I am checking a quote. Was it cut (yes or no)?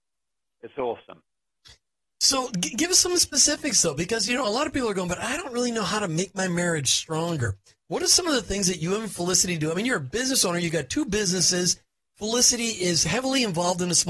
no